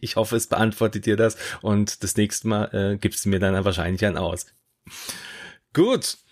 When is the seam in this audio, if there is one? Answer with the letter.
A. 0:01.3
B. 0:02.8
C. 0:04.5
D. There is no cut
C